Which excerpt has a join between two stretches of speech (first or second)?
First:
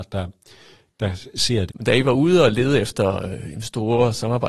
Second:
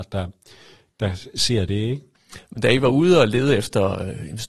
first